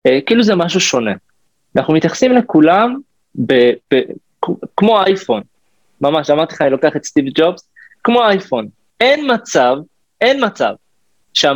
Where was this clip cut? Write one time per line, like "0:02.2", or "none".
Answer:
none